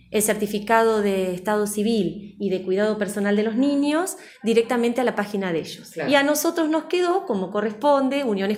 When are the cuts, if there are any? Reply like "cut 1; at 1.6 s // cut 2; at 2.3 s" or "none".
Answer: none